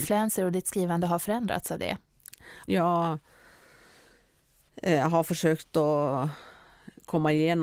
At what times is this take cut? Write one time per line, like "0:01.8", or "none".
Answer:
0:02.7